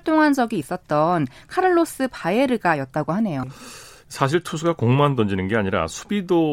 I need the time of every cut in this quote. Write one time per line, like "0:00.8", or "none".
0:03.4